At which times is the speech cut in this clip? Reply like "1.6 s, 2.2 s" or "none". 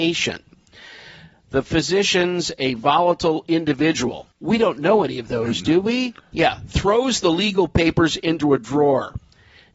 4.3 s, 6.3 s